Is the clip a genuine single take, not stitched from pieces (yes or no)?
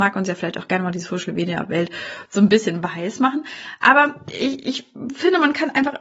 yes